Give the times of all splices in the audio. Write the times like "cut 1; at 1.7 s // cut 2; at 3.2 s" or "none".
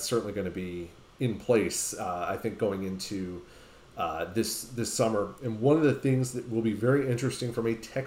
none